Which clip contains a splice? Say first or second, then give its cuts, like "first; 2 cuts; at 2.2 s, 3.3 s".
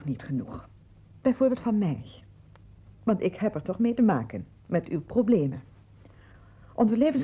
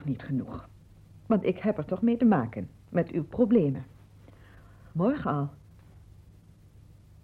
second; 2 cuts; at 1.2 s, 4.9 s